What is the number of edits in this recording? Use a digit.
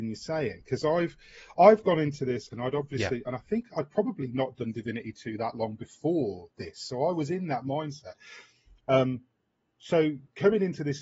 1